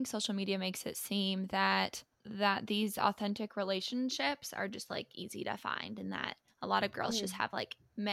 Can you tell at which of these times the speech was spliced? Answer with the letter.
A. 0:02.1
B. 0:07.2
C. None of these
A